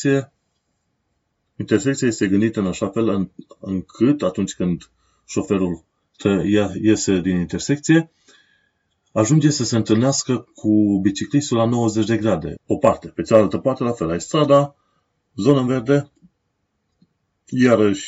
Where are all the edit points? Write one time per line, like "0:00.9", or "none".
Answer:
0:07.2
0:12.6